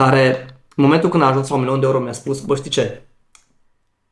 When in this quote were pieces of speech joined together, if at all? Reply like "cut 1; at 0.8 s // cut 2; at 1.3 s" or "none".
none

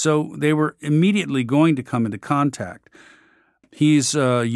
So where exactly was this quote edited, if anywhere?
cut 1; at 3.6 s

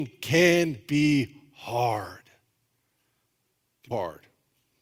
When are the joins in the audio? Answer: cut 1; at 3.9 s

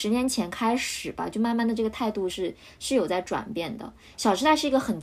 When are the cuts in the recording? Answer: none

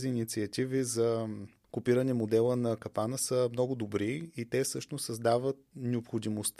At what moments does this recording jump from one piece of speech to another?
none

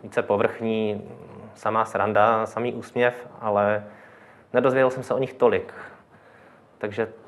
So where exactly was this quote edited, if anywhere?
none

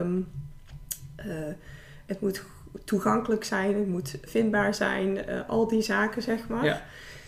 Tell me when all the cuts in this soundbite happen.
cut 1; at 4.3 s

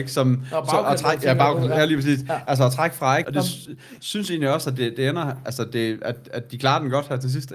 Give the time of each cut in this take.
cut 1; at 3.2 s

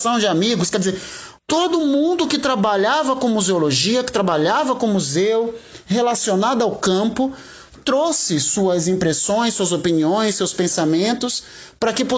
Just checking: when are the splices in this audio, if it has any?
cut 1; at 1.4 s

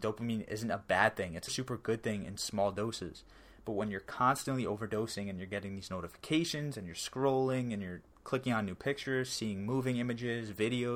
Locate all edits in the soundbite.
cut 1; at 1.5 s

